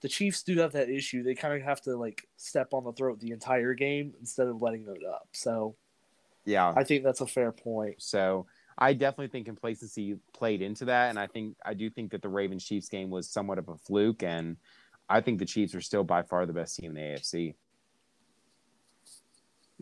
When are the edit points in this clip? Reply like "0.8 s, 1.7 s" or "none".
8.0 s

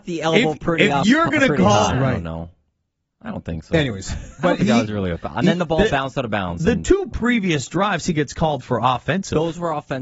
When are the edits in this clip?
1.9 s

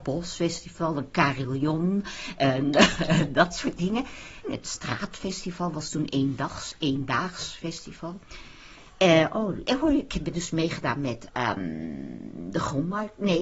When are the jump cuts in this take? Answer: 4.4 s

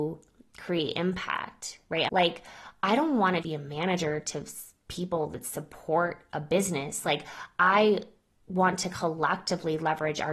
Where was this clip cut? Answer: 2.1 s, 3.4 s

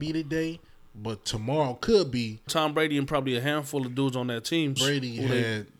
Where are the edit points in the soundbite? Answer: 2.5 s, 4.8 s

